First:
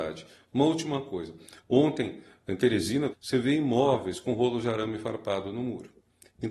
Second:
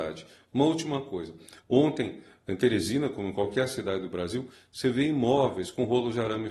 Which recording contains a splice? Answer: first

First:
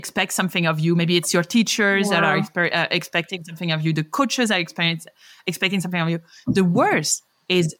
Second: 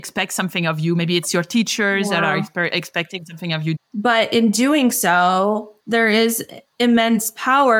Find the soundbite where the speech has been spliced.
second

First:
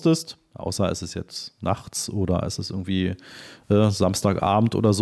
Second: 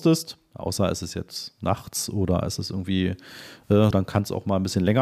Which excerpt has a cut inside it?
second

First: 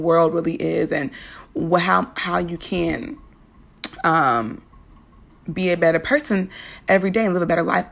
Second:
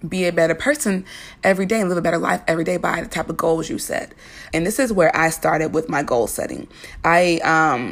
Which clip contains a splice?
second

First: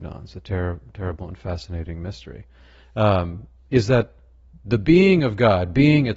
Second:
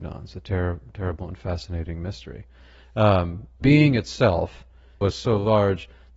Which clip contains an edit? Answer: second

